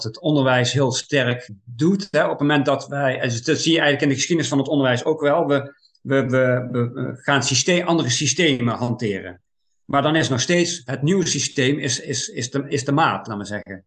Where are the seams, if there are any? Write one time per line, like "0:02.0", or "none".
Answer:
none